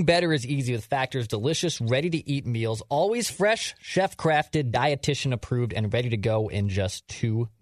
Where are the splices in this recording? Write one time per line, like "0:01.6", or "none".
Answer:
none